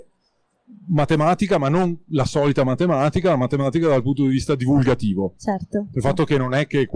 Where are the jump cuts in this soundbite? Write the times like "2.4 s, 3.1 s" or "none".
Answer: 5.9 s